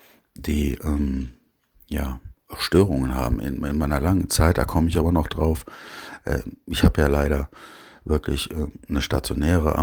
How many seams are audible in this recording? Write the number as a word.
zero